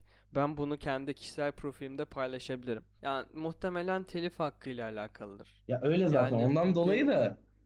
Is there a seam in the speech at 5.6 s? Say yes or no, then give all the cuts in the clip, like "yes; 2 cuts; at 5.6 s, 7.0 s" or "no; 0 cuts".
no; 1 cut; at 3.0 s